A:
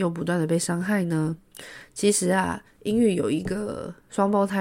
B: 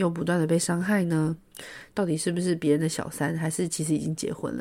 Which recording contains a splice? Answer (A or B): B